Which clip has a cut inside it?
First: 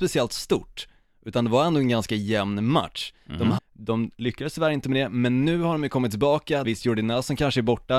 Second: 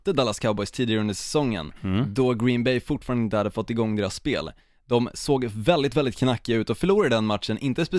first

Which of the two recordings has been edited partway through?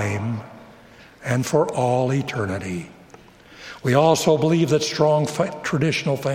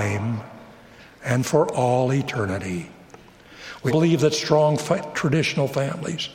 second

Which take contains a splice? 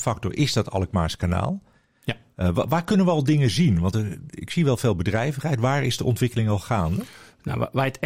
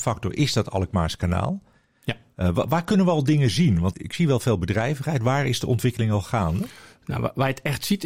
second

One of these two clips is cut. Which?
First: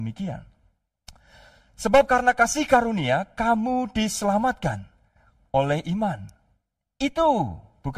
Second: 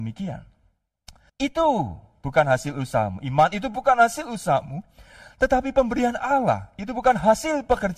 second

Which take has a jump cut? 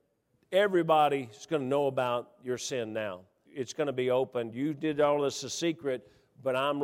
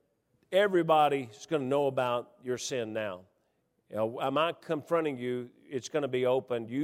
first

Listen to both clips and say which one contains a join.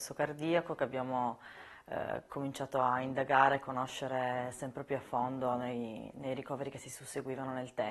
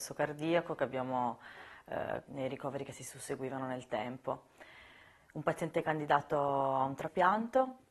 second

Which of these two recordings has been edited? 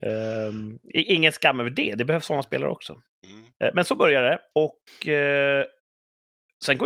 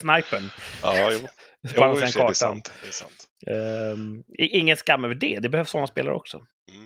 first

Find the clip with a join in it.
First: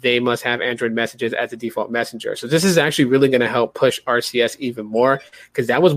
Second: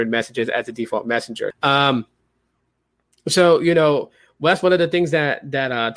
second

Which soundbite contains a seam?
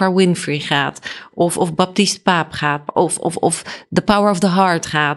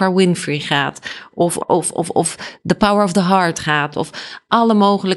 second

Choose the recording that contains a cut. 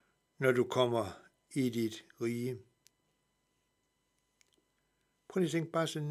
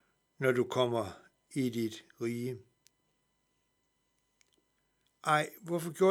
second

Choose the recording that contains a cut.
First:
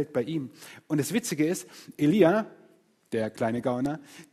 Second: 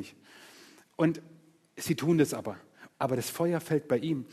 second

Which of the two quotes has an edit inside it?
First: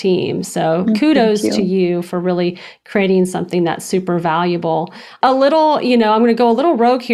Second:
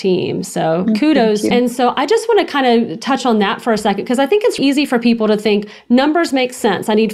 second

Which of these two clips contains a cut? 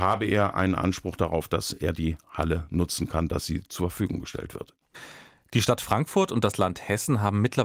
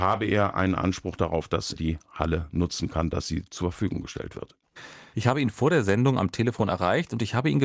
second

